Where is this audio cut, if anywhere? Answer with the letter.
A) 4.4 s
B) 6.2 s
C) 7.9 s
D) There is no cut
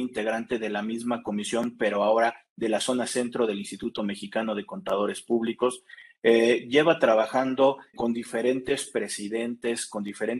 C